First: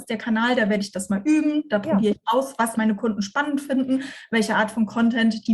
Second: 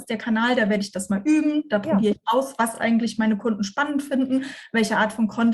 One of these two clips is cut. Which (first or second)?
first